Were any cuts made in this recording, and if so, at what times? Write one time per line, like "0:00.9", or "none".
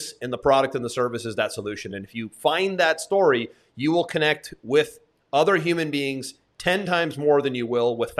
none